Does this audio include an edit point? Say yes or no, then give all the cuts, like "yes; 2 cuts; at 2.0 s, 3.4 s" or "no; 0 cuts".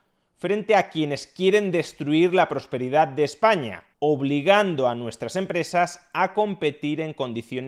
yes; 1 cut; at 3.9 s